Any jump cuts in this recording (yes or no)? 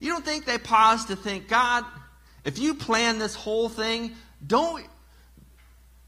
no